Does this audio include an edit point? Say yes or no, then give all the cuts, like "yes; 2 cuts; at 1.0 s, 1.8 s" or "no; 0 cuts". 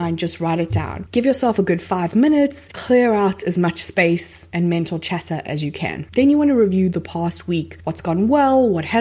no; 0 cuts